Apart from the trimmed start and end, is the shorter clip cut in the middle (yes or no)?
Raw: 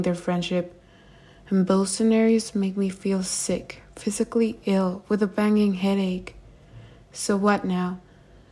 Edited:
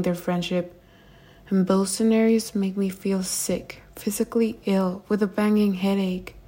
no